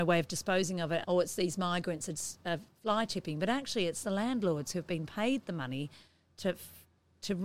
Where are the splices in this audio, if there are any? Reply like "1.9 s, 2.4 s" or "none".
1.0 s